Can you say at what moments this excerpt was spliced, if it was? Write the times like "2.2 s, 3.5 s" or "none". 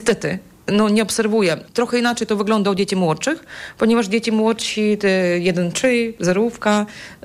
none